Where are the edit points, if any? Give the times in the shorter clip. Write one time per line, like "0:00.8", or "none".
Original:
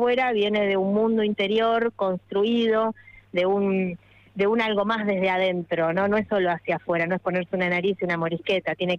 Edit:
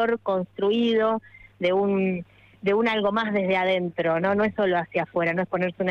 none